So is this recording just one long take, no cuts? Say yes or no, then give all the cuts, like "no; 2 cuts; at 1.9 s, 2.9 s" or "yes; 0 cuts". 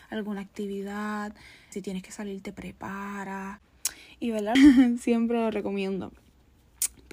no; 2 cuts; at 1.7 s, 4.6 s